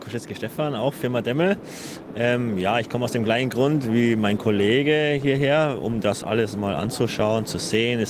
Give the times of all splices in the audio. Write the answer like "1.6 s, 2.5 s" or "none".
none